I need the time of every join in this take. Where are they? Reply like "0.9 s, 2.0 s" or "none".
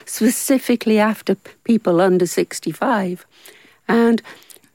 none